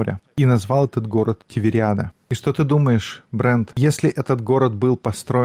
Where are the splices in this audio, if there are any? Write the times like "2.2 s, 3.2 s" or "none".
none